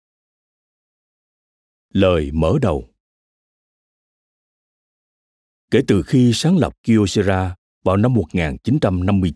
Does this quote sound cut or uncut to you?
uncut